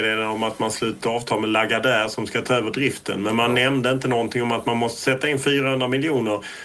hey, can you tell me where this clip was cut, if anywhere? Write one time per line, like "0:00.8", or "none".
none